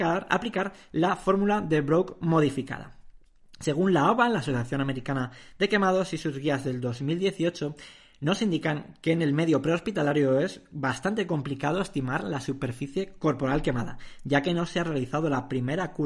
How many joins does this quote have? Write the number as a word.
zero